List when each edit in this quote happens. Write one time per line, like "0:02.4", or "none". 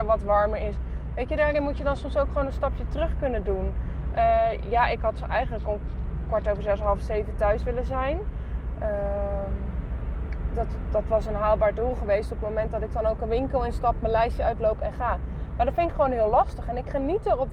none